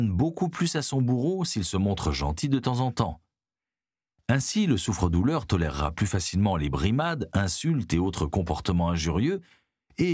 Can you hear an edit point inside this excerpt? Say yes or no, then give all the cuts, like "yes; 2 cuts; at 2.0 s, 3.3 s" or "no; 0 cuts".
no; 0 cuts